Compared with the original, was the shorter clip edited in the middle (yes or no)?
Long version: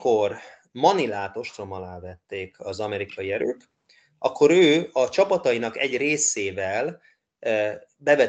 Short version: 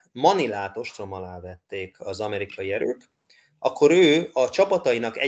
no